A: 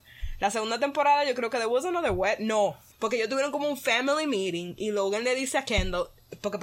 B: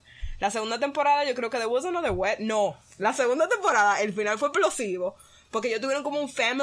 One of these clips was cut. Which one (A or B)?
A